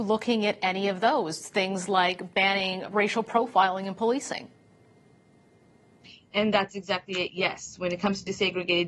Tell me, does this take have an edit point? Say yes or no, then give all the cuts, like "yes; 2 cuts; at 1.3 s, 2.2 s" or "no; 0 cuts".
no; 0 cuts